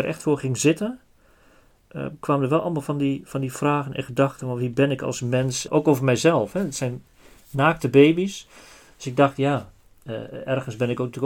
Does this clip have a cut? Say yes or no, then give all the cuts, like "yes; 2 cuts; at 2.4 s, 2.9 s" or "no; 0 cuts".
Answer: no; 0 cuts